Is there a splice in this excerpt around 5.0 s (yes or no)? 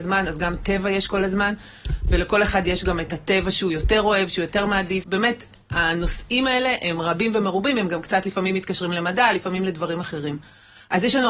yes